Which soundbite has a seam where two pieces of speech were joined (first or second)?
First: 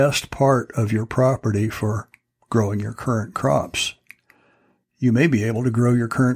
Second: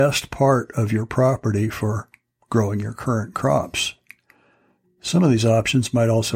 second